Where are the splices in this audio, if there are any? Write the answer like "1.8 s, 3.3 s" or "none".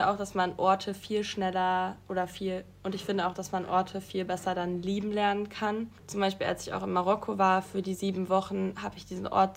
6.0 s